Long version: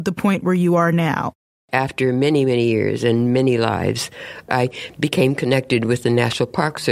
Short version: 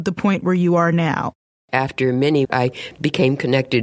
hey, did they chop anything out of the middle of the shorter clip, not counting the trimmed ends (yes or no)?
yes